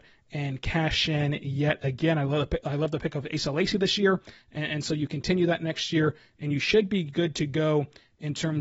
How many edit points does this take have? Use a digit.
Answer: 0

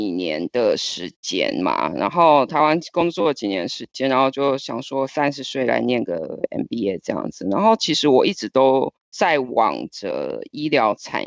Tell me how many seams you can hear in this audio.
1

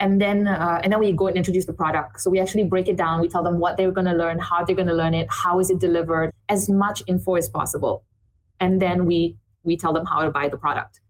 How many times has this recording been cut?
1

